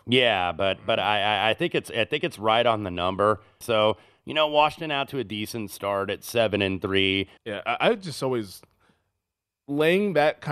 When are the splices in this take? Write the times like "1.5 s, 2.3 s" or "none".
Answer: 3.6 s, 7.4 s